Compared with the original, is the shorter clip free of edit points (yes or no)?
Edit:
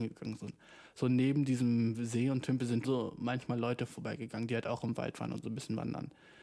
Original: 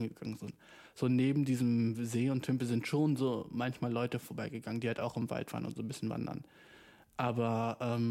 no